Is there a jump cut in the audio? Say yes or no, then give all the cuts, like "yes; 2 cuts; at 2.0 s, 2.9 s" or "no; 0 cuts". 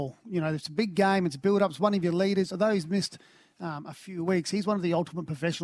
no; 0 cuts